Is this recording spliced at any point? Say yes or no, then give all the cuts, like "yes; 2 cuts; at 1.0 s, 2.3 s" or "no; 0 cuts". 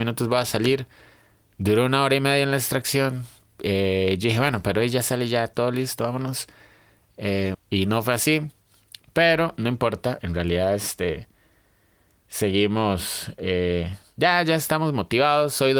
yes; 1 cut; at 7.5 s